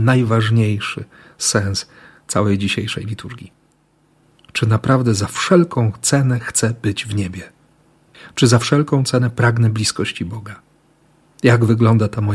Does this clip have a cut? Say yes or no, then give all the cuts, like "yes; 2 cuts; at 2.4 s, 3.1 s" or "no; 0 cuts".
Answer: no; 0 cuts